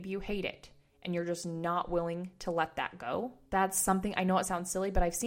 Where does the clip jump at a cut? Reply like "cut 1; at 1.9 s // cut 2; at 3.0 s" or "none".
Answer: cut 1; at 3.5 s